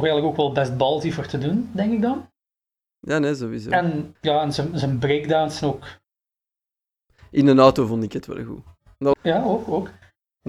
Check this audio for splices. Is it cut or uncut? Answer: cut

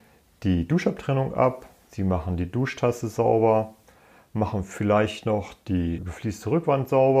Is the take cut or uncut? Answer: cut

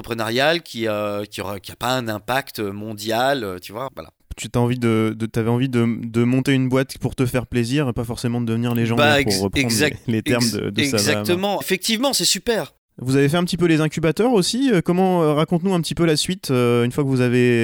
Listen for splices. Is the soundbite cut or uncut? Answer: cut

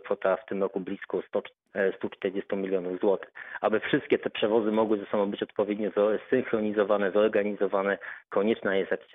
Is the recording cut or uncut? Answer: cut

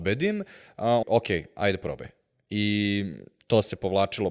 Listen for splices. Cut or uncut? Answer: cut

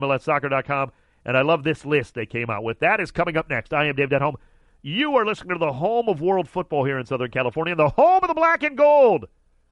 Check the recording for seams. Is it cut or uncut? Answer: uncut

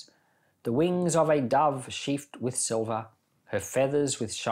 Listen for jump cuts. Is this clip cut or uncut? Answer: uncut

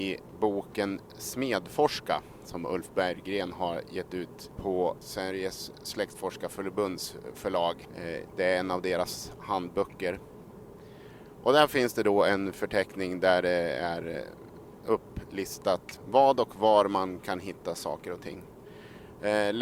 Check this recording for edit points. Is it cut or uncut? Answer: uncut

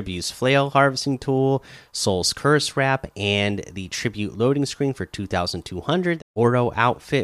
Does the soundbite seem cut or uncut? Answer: cut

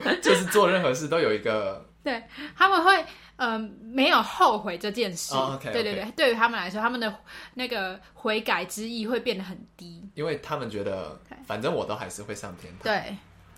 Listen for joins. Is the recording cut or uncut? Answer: uncut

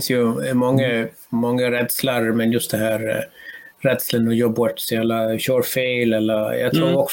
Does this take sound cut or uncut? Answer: uncut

